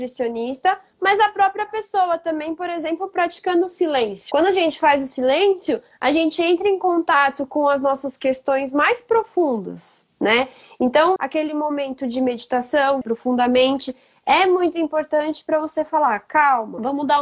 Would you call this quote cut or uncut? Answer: cut